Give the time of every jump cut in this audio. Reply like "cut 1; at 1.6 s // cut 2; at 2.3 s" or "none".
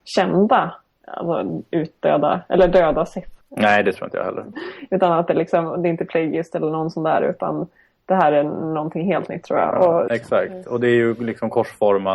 cut 1; at 3.4 s // cut 2; at 4.5 s // cut 3; at 10.1 s